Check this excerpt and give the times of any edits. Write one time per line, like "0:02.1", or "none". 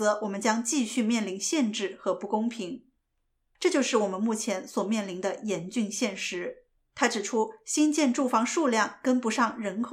0:03.5
0:06.8